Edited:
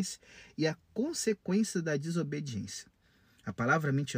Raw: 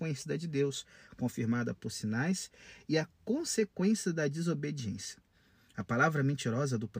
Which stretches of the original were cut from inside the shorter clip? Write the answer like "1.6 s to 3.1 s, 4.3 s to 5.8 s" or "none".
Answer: none